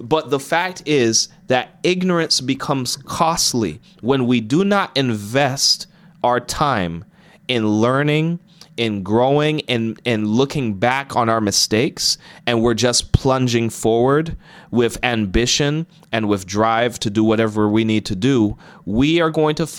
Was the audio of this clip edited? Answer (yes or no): no